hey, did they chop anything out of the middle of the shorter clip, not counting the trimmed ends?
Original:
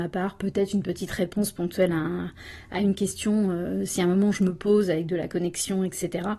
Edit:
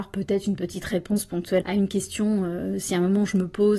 yes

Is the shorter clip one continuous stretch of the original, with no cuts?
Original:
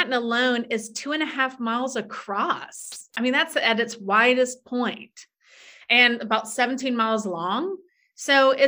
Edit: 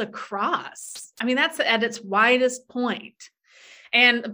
yes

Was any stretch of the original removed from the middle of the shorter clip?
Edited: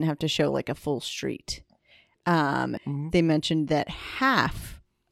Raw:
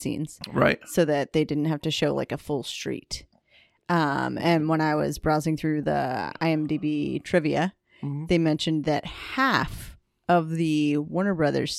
yes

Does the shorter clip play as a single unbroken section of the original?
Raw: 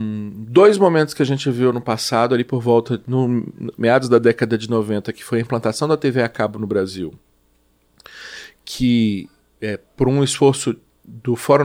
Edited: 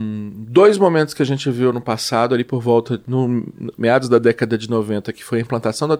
yes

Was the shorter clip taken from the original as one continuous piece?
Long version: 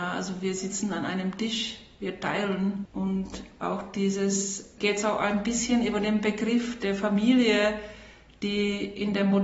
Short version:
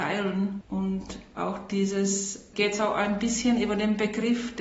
yes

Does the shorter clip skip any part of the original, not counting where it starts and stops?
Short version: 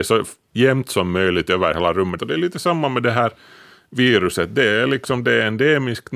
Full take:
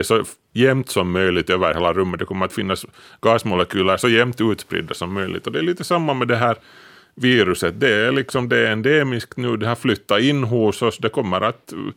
yes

